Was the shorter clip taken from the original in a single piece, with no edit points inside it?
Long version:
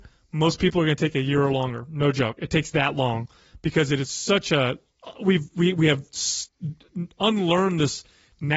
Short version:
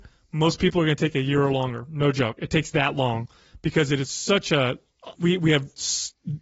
no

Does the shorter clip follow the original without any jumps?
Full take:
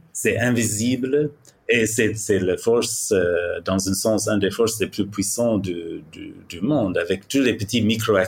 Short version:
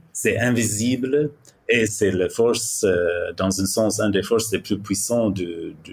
no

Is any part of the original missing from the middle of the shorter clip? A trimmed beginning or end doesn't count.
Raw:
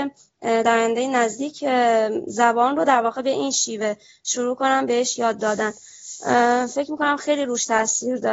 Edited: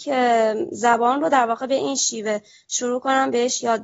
no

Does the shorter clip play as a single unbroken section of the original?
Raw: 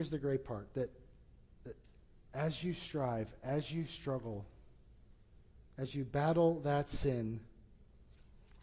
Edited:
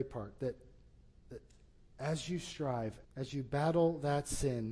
no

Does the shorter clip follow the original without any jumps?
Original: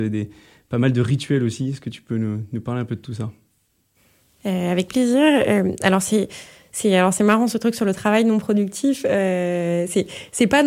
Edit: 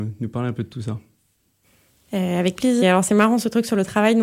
no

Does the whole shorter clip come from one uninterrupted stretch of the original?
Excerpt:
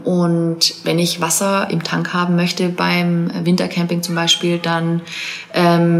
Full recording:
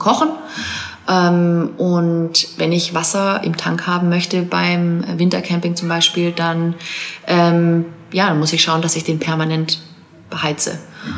yes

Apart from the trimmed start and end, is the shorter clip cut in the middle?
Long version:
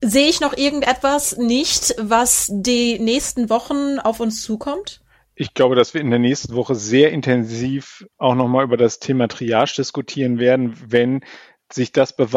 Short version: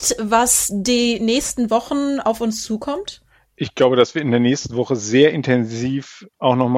no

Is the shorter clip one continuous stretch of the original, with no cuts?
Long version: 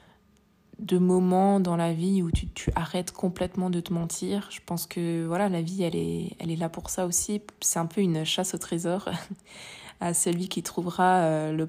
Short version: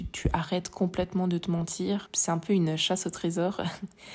no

